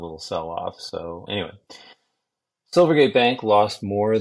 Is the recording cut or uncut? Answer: cut